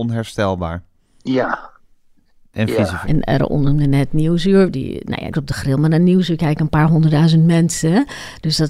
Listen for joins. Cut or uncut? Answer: cut